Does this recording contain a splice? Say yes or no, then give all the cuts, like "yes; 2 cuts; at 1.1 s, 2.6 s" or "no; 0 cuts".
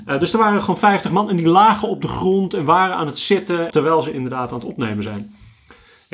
yes; 1 cut; at 3.7 s